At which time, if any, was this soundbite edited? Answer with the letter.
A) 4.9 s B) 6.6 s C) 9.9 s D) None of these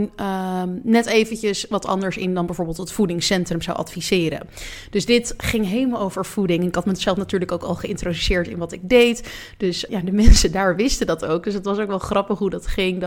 C